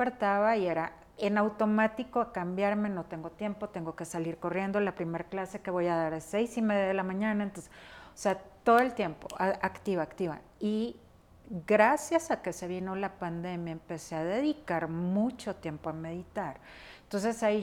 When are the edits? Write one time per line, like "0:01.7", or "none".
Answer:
none